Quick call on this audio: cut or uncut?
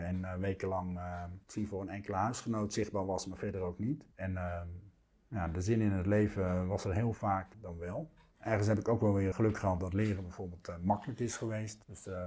cut